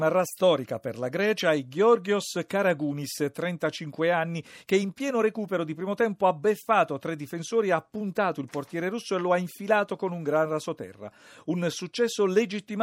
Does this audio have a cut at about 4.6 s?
no; 0 cuts

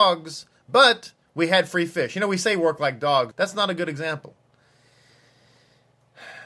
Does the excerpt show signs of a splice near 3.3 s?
yes; 1 cut; at 3.3 s

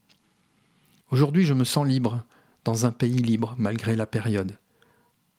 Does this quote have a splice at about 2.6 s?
no; 1 cut; at 1.0 s

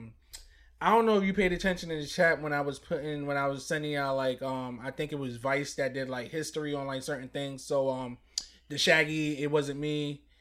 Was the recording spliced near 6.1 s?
no; 0 cuts

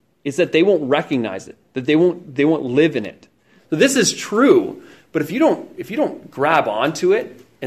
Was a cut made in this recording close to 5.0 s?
no; 1 cut; at 3.6 s

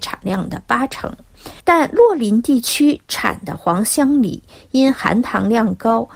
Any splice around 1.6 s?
yes; 1 cut; at 1.6 s

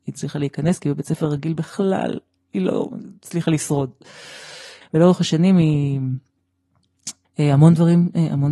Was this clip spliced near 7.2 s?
yes; 2 cuts; at 4.8 s, 7.2 s

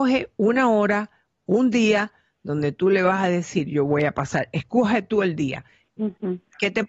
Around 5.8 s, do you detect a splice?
yes; 1 cut; at 5.8 s

